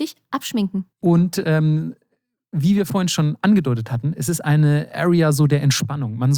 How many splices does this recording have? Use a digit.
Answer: 1